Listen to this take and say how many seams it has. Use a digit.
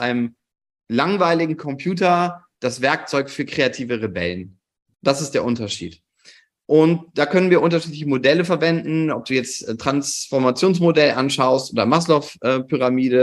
0